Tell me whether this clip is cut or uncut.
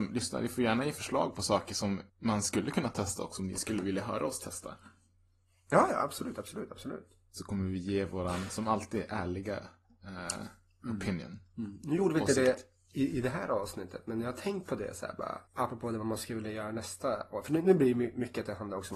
cut